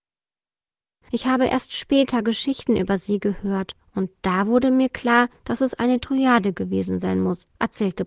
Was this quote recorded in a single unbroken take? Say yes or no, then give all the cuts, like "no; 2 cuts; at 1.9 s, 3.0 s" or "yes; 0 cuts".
yes; 0 cuts